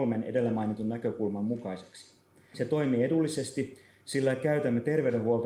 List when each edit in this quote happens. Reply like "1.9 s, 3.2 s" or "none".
2.5 s